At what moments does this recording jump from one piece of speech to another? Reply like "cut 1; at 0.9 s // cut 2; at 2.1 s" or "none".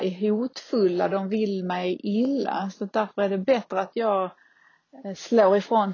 none